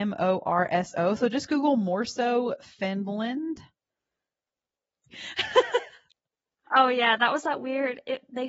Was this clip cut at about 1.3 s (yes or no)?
no